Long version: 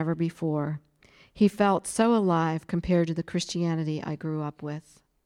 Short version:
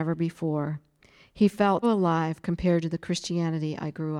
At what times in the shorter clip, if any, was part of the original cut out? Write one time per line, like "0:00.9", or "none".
0:01.8